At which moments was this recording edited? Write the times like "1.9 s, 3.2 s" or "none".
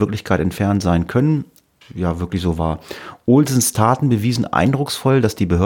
1.8 s